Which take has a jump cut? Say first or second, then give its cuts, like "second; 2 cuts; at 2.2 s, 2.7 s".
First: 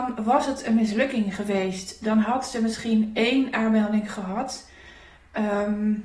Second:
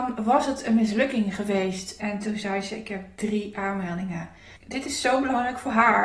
second; 2 cuts; at 2.0 s, 4.6 s